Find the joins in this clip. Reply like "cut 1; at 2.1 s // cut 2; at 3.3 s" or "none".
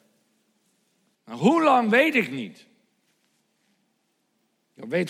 cut 1; at 1.1 s